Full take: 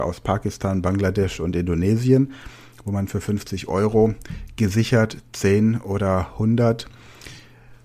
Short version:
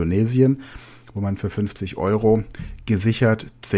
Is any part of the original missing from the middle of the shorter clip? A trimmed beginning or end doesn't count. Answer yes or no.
no